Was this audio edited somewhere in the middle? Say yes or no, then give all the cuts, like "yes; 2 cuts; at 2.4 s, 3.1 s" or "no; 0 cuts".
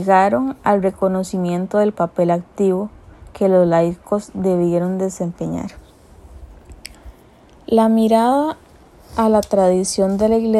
no; 0 cuts